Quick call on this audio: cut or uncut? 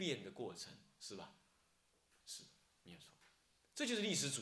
uncut